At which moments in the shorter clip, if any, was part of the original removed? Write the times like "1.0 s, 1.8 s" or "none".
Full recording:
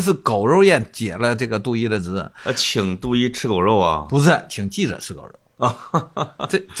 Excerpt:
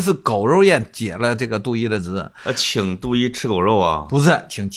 none